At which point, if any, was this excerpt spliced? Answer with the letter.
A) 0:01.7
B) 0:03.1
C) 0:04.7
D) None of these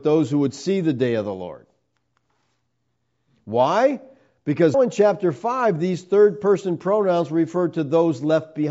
C